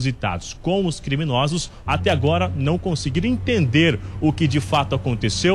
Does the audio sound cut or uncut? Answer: cut